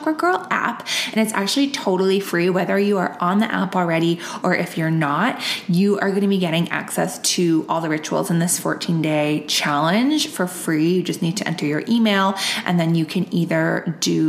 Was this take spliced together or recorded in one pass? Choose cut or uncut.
uncut